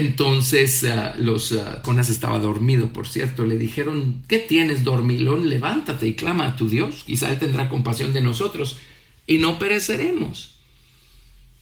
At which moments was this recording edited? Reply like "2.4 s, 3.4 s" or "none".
1.8 s

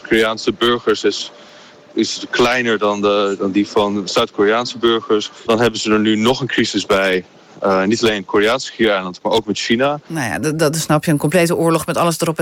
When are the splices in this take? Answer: 5.5 s, 10.1 s

